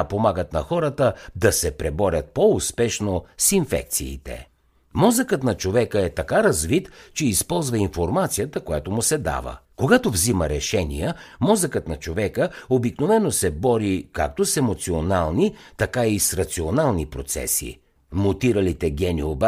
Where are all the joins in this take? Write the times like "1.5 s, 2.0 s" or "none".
9.6 s, 18.0 s